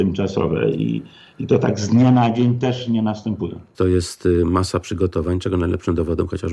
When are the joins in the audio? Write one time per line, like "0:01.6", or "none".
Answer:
0:03.7

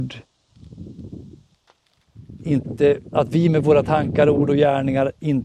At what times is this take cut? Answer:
none

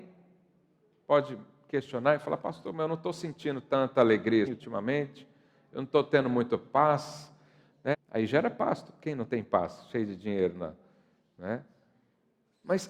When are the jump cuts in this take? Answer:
0:04.5
0:07.9

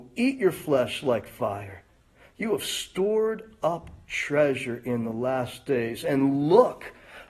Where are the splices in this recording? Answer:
none

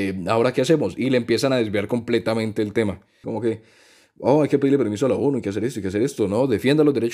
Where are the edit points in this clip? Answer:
0:03.2

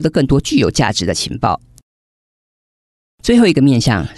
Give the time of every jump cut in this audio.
none

